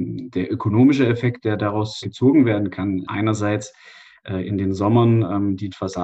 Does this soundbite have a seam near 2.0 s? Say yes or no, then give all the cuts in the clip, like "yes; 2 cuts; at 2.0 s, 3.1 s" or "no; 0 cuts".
yes; 2 cuts; at 2.0 s, 3.0 s